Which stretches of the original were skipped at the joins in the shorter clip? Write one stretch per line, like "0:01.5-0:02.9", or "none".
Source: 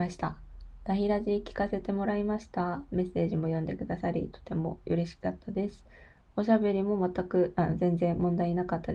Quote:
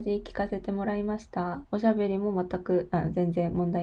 0:02.8-0:06.3